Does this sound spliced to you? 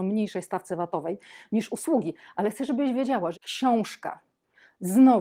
yes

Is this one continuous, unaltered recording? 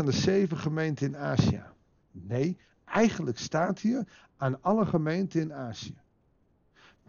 no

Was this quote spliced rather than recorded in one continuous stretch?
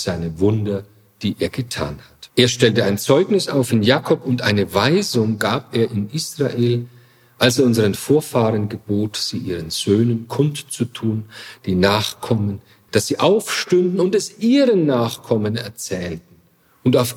yes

